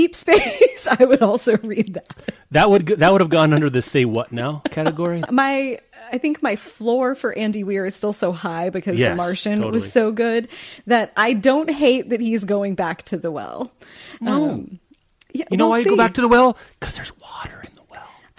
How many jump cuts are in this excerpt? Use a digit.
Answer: 1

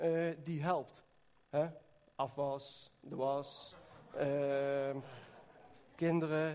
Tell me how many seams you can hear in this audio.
0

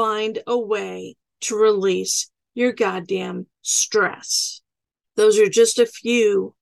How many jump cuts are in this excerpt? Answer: 1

